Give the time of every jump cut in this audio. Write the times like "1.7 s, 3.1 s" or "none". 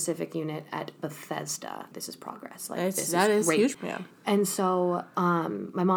1.9 s, 3.7 s

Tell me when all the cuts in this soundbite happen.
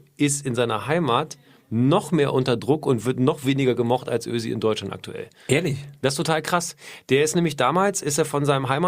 none

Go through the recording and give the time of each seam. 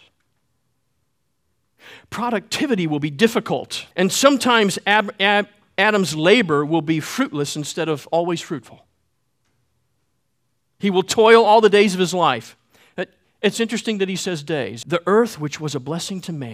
3.9 s, 14.8 s

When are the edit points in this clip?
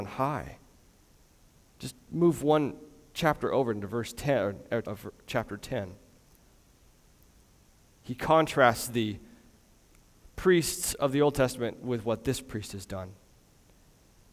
4.8 s

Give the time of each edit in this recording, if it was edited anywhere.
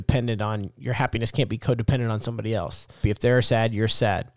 3.0 s

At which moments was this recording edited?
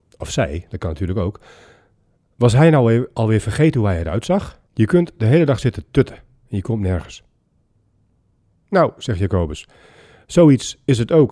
4.6 s

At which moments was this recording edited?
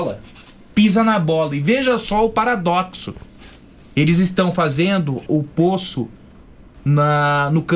5.3 s

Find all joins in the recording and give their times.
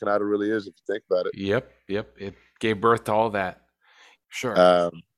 4.2 s

